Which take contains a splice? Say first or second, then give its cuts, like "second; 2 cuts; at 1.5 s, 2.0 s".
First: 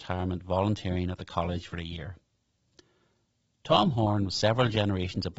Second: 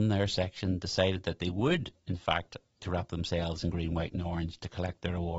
second; 1 cut; at 2.8 s